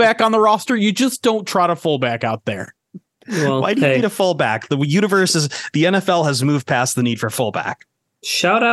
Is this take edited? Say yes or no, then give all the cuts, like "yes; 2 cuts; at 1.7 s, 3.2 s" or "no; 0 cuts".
no; 0 cuts